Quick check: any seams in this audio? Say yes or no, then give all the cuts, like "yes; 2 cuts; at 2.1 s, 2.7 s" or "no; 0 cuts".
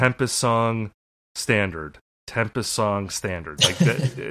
no; 0 cuts